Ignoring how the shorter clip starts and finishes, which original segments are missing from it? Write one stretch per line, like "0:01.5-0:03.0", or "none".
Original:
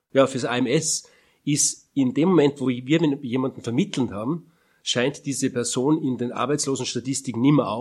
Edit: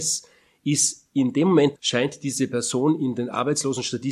0:02.6-0:04.8